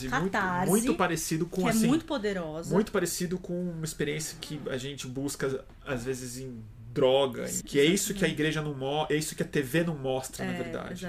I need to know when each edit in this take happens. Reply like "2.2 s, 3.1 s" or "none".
7.6 s